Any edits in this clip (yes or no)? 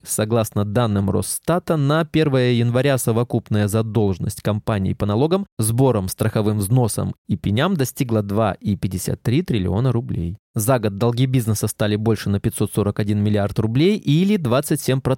no